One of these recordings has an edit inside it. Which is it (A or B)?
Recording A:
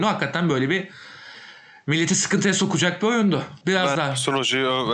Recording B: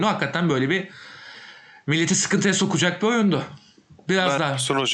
A